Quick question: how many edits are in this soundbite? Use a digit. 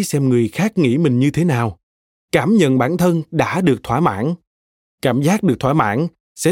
1